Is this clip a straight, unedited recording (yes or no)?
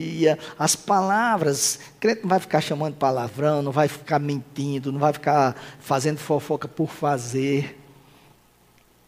yes